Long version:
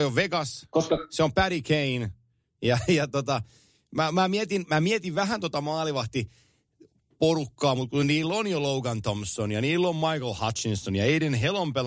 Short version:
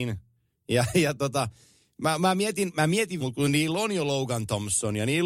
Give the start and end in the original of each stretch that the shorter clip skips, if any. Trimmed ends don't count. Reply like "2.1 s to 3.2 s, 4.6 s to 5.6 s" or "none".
5.1 s to 7.8 s